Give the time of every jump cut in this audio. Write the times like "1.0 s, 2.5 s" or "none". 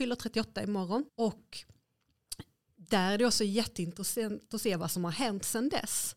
1.1 s